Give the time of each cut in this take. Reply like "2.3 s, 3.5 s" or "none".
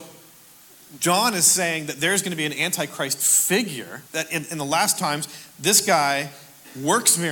1.0 s, 4.1 s

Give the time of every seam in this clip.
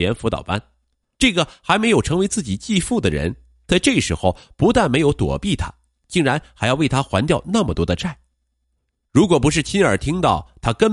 1.2 s

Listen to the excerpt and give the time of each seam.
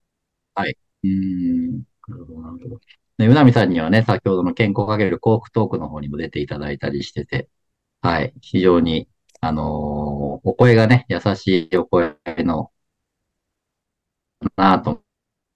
0.9 s

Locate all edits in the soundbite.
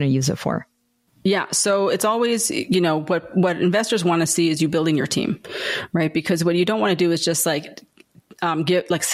none

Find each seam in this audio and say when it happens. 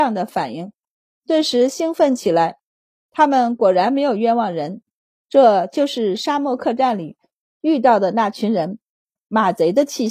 none

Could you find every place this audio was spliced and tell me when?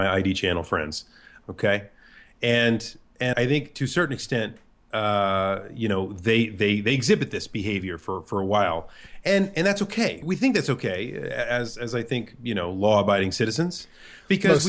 1.4 s, 3.3 s, 10.2 s

